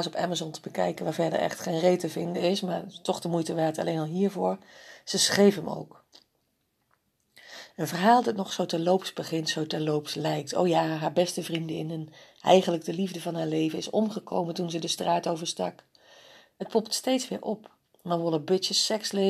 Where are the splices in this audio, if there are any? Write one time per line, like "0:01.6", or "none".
none